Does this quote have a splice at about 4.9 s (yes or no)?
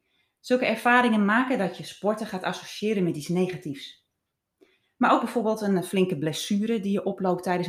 no